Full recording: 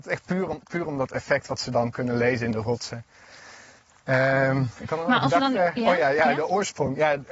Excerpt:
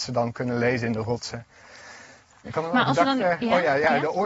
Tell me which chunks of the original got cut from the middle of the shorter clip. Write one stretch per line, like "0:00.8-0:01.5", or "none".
0:04.0-0:04.8